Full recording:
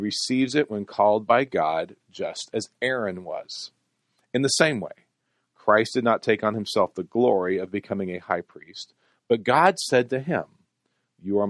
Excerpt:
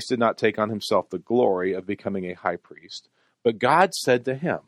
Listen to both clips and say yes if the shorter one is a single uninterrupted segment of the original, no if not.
yes